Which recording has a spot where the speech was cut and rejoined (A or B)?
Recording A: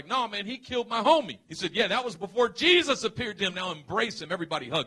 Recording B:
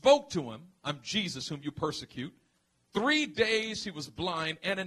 A